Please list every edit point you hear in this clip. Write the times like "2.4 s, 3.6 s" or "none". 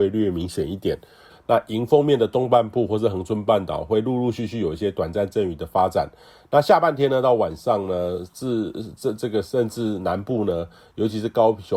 1.3 s